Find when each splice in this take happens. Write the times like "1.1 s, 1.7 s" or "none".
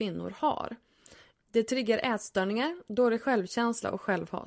1.3 s